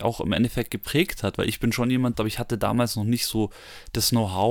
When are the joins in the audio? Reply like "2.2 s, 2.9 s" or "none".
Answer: 2.1 s